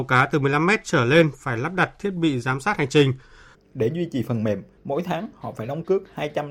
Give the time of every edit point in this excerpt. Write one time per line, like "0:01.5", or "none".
0:03.5